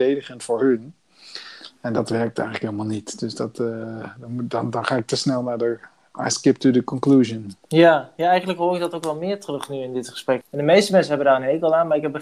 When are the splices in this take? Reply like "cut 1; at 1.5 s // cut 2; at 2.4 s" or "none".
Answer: cut 1; at 7.6 s // cut 2; at 10.4 s